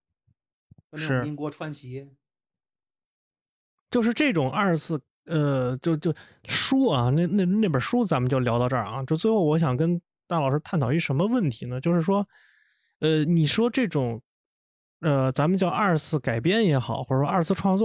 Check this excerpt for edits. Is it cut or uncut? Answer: uncut